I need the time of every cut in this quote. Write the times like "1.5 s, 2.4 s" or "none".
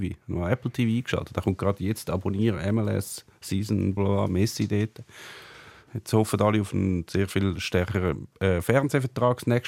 4.0 s, 5.9 s